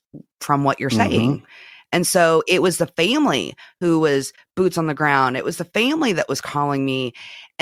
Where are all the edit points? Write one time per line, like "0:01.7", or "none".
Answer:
none